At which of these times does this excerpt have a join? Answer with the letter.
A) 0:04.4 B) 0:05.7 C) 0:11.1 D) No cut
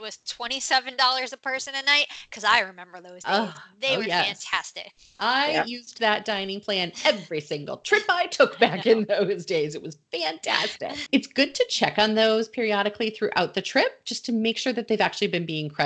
C